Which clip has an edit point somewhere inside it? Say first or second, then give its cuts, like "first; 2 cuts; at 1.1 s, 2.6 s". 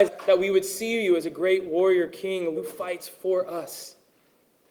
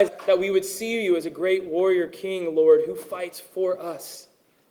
first; 1 cut; at 2.5 s